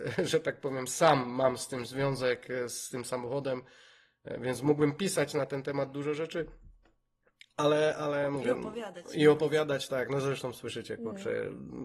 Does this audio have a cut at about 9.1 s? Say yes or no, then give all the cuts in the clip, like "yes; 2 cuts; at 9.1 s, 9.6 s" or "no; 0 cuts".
no; 0 cuts